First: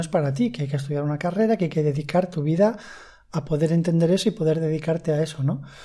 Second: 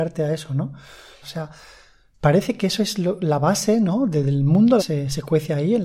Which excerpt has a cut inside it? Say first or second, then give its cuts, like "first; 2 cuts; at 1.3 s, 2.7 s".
second; 2 cuts; at 1.2 s, 4.8 s